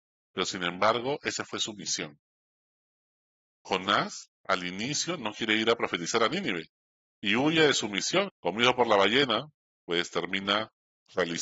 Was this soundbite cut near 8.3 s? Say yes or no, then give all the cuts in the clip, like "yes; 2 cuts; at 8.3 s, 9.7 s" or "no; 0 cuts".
yes; 1 cut; at 8.3 s